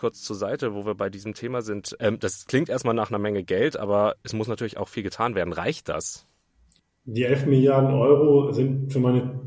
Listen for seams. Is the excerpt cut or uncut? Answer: cut